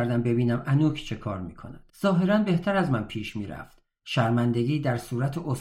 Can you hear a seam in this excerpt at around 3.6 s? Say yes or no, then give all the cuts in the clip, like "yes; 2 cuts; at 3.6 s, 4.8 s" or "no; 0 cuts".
no; 1 cut; at 1.9 s